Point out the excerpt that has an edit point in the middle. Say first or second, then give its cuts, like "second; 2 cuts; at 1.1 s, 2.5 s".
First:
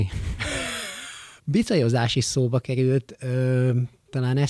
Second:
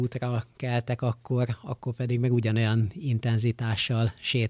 first; 1 cut; at 1.4 s